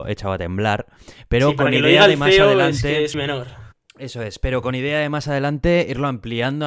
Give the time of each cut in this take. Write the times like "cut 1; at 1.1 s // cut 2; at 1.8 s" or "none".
cut 1; at 3.1 s